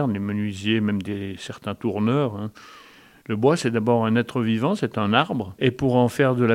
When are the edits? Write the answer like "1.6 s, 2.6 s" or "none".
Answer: none